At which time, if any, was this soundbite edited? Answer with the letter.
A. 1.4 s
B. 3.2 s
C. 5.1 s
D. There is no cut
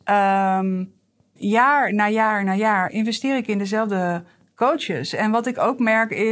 A